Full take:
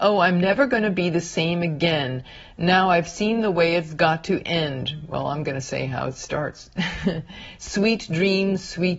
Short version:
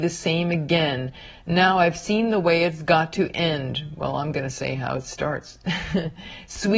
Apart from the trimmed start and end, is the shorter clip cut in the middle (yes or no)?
no